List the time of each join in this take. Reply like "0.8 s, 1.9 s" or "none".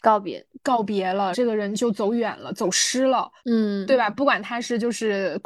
1.3 s, 3.4 s